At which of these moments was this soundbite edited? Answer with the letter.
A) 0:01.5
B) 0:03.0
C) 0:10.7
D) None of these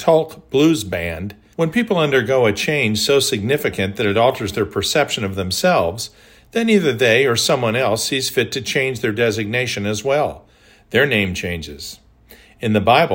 A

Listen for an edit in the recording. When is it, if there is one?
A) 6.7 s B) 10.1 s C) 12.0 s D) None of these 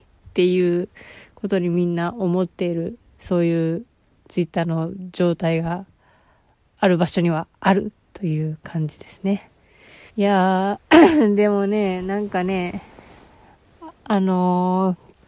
B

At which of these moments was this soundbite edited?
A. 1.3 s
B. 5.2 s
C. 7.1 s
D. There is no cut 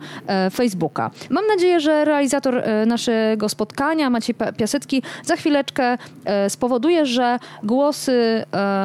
A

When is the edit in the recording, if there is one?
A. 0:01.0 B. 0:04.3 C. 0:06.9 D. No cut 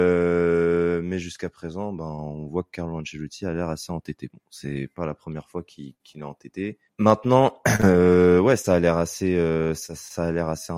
C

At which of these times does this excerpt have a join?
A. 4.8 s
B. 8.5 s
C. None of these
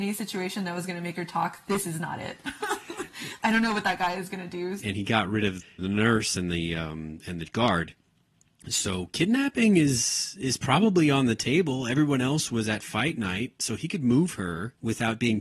A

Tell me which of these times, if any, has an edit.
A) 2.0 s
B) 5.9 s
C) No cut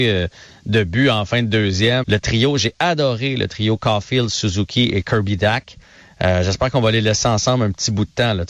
A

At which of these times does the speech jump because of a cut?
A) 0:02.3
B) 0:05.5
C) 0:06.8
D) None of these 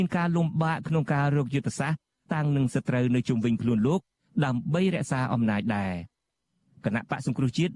A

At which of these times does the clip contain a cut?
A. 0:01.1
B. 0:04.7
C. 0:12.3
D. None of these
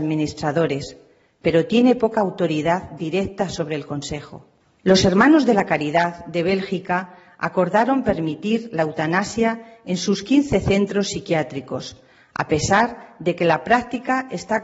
B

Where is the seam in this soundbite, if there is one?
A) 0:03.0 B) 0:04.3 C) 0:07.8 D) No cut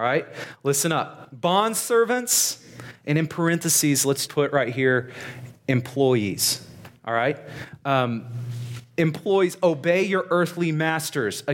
B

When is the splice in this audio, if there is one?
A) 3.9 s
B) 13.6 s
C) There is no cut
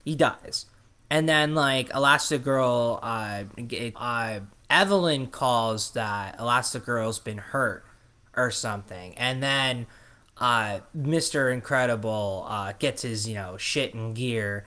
A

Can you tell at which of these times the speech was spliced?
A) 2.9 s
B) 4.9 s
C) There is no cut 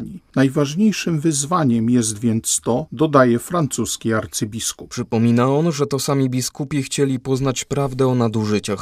A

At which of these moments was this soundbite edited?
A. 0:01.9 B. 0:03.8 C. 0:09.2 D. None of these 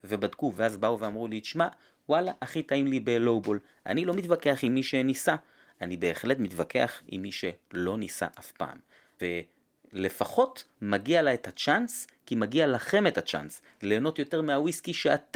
C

